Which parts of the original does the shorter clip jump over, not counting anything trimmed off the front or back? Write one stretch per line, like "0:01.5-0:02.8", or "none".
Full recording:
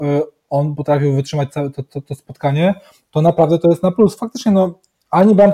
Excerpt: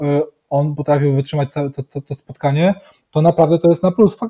none

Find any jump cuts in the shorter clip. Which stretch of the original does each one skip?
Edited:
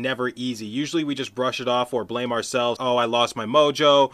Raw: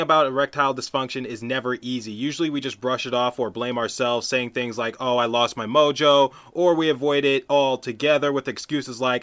0:04.2-0:05.0

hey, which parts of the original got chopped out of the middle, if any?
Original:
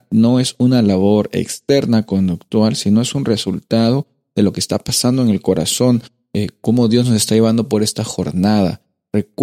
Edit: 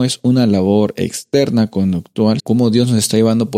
0:02.8-0:06.6

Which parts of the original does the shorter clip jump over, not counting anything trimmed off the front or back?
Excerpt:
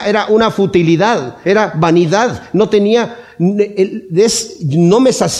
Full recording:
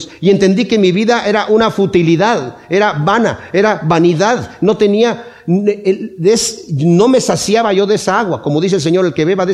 0:02.6-0:03.5

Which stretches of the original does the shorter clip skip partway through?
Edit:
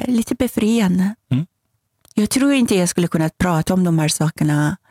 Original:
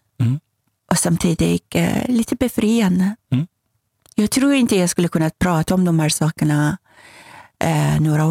none

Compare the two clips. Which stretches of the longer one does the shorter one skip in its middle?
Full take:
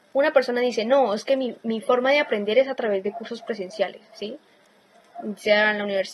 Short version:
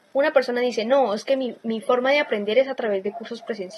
none

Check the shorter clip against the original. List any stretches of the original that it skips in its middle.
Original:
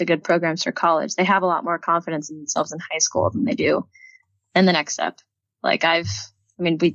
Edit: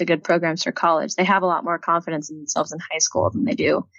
none

